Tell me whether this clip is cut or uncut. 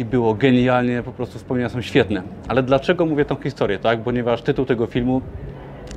uncut